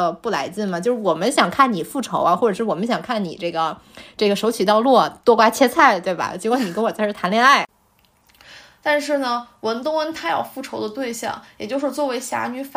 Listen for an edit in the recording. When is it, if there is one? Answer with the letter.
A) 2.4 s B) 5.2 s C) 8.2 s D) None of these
D